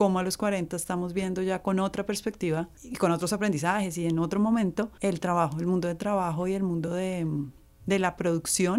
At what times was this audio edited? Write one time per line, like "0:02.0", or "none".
none